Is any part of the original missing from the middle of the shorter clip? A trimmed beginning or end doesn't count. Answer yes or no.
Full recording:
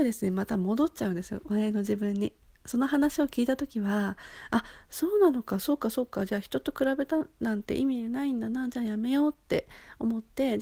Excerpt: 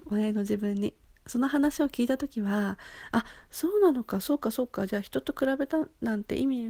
no